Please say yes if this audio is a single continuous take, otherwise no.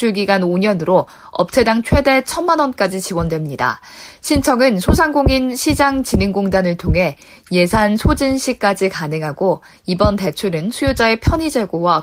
yes